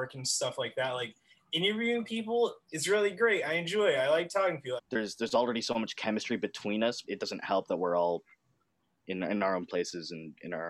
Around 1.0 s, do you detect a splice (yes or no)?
no